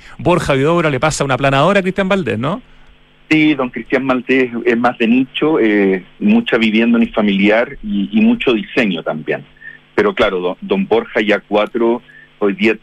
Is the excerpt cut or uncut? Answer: uncut